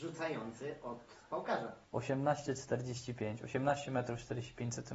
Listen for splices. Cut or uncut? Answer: uncut